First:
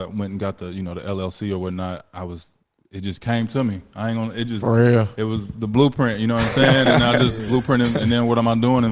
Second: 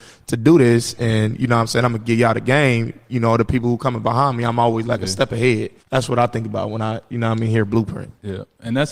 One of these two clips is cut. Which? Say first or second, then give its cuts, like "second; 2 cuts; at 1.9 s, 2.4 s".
second; 1 cut; at 5.8 s